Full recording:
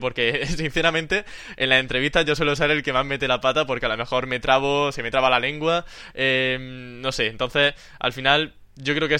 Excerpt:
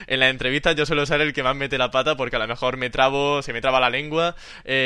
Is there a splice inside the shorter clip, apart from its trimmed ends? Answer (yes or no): no